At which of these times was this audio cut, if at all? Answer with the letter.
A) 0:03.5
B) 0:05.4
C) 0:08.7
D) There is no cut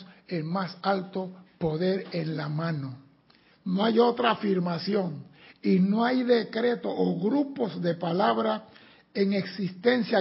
A